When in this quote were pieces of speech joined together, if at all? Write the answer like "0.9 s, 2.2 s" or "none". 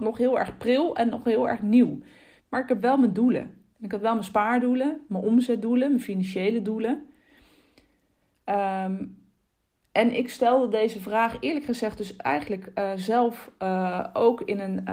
2.4 s